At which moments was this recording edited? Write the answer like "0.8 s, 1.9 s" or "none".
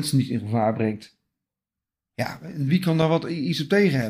none